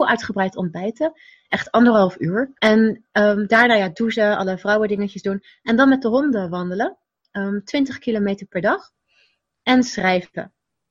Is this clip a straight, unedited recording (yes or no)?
no